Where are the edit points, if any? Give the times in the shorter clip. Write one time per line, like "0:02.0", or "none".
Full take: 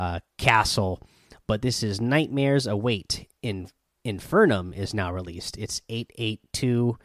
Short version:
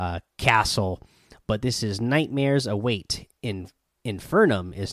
none

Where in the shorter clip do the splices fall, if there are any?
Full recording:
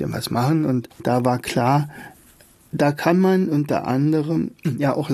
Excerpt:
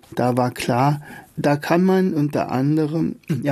0:01.3

